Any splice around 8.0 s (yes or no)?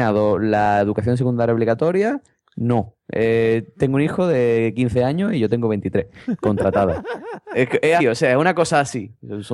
yes